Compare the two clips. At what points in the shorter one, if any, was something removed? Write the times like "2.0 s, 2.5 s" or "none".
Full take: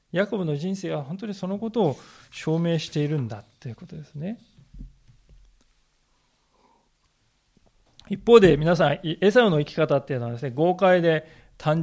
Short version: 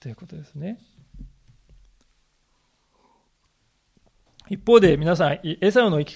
none